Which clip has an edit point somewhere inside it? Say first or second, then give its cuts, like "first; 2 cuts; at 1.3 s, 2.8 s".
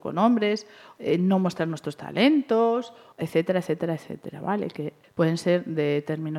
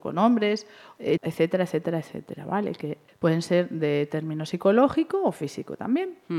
second; 1 cut; at 1.2 s